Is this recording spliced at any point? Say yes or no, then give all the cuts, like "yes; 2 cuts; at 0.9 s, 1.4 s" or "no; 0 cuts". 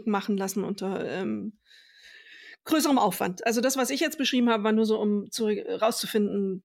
no; 0 cuts